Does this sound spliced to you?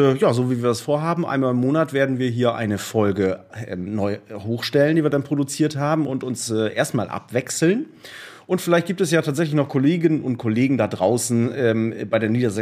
no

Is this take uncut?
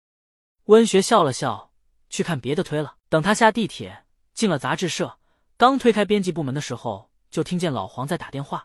no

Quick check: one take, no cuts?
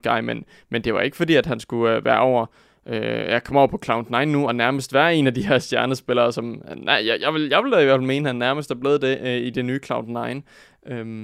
yes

